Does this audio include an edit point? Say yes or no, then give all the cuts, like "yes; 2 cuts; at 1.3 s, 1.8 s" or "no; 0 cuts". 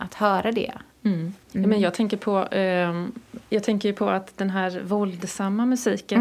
yes; 1 cut; at 1.4 s